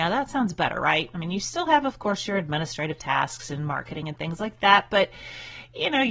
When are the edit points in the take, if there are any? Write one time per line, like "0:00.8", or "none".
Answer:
none